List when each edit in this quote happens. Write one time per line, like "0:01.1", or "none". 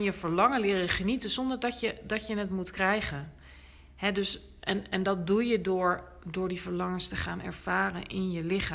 none

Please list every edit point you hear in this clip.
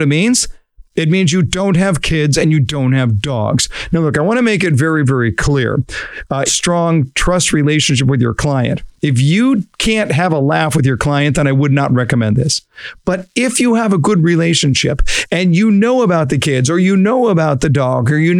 0:06.5

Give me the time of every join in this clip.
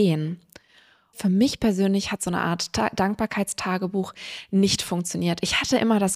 0:01.1

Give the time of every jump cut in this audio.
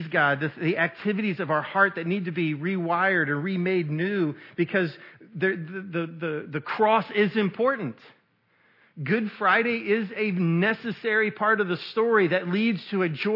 none

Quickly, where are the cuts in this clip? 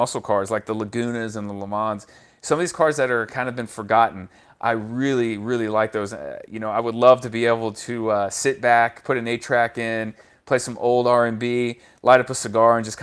none

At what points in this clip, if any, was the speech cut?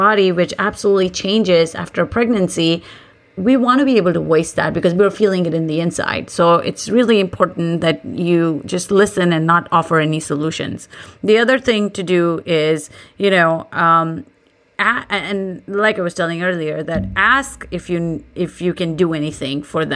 none

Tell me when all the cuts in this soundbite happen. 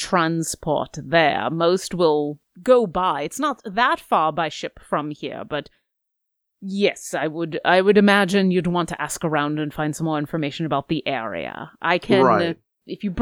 none

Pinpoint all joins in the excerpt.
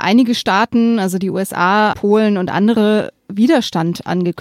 0:01.9

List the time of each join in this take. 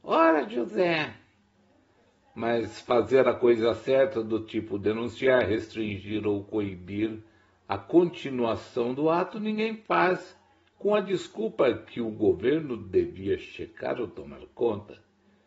none

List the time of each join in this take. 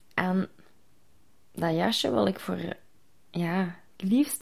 none

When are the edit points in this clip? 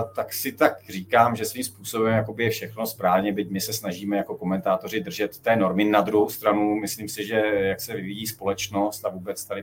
none

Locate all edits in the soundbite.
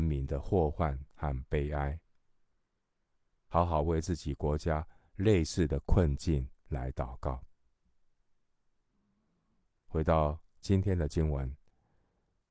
0:03.5

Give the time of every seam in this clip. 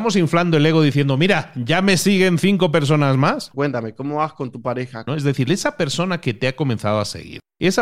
0:03.5
0:05.1

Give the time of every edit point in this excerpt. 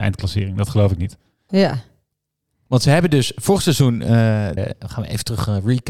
0:01.5
0:04.6

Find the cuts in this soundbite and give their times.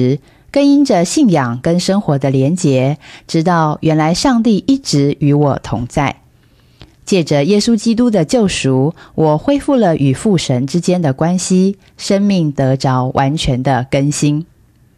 none

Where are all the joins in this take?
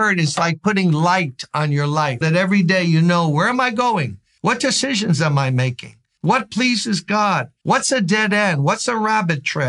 0:02.2

